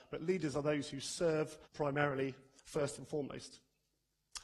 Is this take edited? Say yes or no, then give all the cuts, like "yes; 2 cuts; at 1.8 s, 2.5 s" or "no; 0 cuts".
yes; 1 cut; at 1.7 s